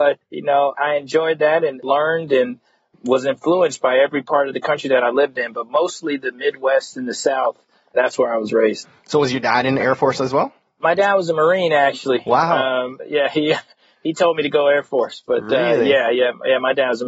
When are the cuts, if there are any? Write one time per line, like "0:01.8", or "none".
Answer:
none